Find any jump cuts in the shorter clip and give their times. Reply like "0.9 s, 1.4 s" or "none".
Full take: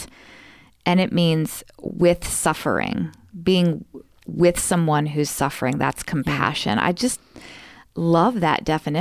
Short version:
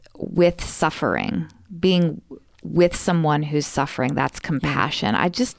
none